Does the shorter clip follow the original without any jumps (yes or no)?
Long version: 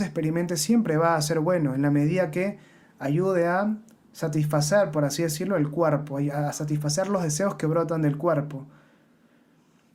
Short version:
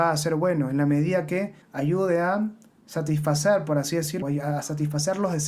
no